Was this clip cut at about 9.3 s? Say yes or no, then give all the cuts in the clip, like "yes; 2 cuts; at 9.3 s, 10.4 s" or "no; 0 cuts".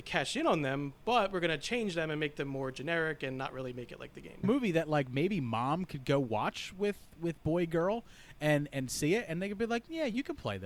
no; 1 cut; at 4.4 s